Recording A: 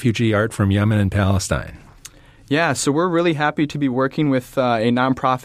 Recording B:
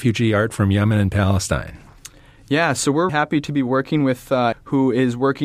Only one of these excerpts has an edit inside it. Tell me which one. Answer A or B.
B